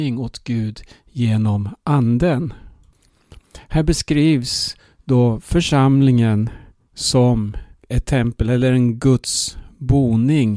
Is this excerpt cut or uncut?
cut